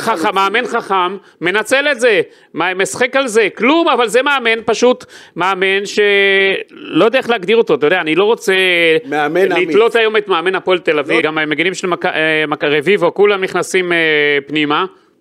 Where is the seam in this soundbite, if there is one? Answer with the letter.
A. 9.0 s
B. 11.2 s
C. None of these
B